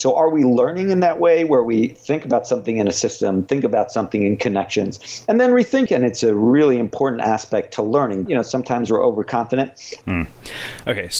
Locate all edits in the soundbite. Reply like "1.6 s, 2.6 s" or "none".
5.9 s, 8.3 s, 10.0 s